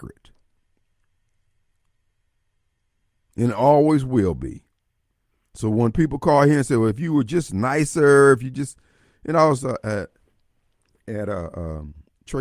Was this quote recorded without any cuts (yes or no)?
yes